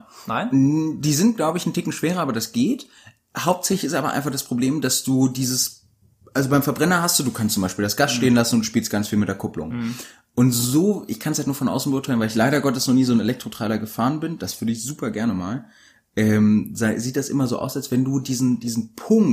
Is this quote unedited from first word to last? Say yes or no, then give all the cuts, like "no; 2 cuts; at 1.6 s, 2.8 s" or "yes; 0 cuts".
yes; 0 cuts